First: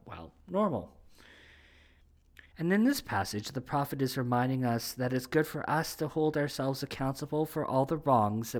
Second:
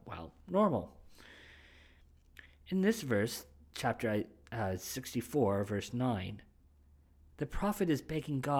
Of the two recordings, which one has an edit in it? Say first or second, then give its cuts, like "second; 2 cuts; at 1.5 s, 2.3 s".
first; 1 cut; at 2.5 s